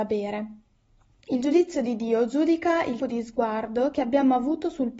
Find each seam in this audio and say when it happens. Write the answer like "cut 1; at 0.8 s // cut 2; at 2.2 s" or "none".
cut 1; at 3.0 s